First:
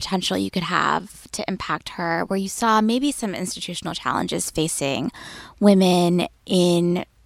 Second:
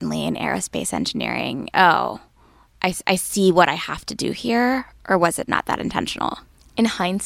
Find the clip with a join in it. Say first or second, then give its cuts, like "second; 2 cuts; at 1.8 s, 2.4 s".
second; 1 cut; at 1.7 s